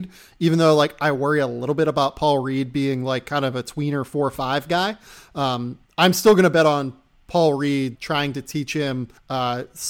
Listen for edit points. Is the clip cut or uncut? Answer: cut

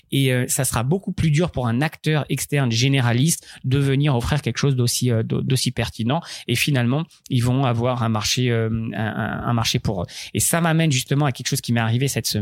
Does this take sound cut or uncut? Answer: uncut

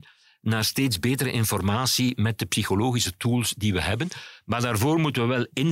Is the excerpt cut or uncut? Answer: uncut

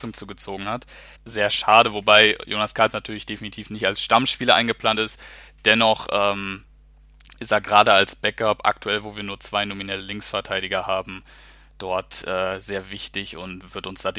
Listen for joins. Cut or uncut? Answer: cut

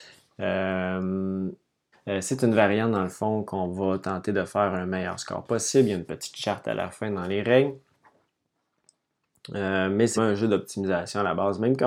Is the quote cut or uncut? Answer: cut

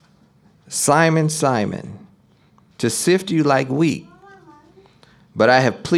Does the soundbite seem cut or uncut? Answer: cut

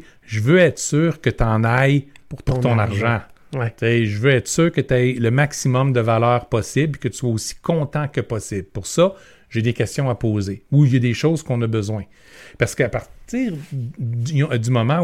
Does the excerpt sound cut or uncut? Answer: uncut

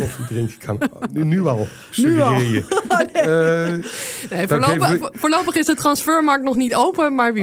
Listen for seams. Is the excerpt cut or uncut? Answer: uncut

